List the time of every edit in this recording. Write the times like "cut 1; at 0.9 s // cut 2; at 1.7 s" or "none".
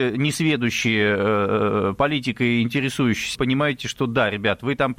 cut 1; at 3.4 s